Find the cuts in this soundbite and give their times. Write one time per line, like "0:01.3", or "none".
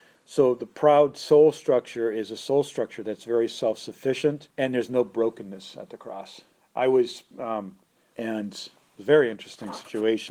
0:04.5
0:06.6
0:08.1